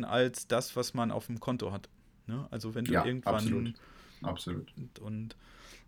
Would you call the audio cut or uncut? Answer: cut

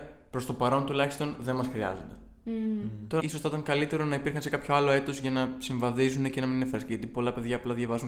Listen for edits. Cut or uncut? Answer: cut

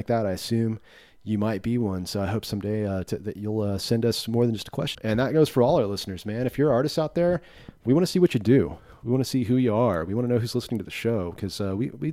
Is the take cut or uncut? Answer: cut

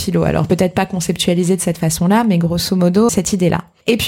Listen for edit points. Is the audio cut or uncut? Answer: cut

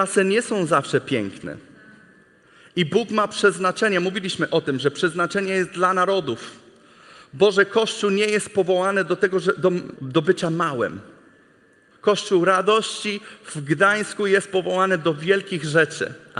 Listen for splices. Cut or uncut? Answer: cut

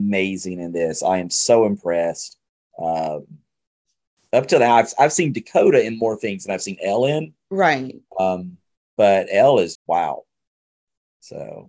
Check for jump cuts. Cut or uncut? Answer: cut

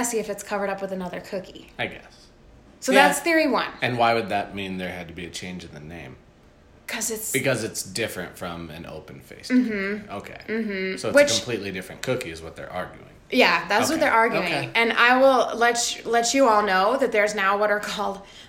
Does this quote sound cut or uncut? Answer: cut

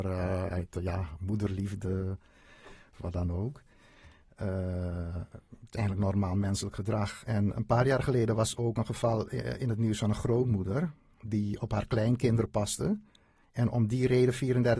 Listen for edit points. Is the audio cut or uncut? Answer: uncut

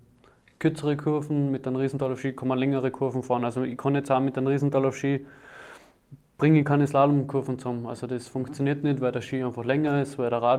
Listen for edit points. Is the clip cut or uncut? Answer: uncut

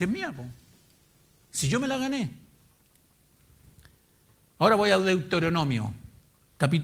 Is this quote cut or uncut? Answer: uncut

